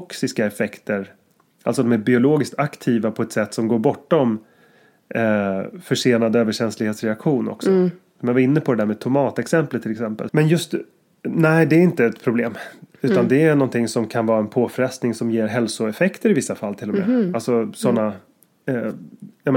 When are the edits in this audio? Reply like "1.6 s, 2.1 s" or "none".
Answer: 10.3 s